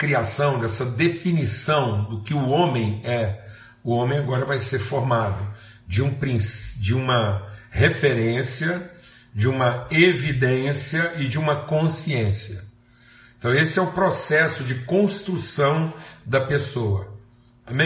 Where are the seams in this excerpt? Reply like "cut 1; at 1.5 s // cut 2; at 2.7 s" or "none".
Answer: none